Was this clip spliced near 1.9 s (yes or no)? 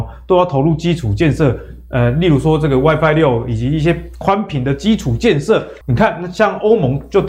no